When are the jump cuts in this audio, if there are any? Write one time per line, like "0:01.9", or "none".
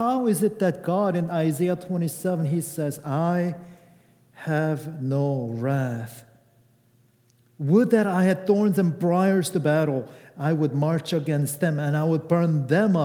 none